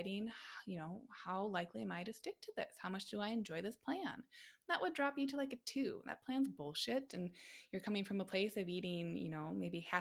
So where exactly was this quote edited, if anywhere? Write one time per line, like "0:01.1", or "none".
0:07.1